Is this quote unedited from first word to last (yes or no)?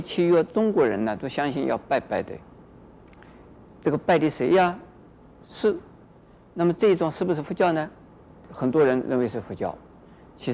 no